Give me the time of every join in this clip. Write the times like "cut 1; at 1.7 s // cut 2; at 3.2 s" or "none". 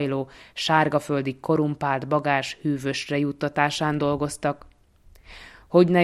none